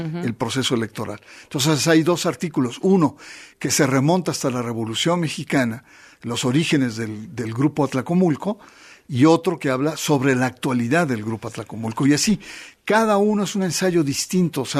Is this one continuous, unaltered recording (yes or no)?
yes